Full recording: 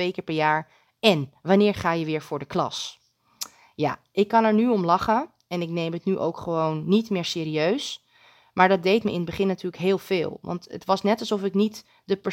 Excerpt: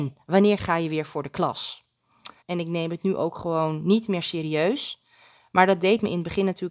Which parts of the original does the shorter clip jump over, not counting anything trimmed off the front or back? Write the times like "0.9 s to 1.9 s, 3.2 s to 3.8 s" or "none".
3.6 s to 5.4 s